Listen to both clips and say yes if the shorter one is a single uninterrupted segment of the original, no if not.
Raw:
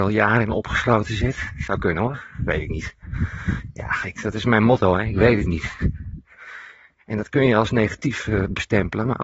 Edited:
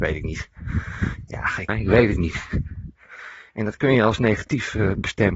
no